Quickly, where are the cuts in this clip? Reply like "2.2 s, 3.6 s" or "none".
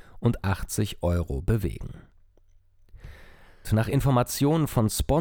3.6 s